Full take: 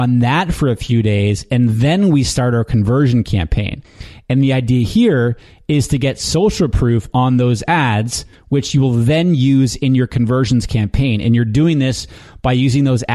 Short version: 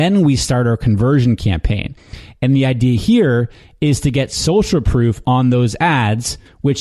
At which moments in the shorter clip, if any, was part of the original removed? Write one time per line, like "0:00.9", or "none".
none